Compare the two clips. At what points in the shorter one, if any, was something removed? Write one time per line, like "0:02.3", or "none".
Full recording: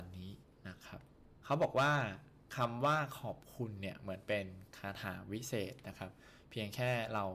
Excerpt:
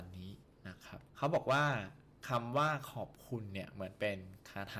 0:01.1